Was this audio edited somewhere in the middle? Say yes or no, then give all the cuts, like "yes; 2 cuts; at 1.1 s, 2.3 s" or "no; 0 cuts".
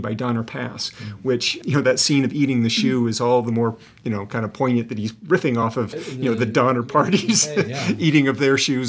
no; 0 cuts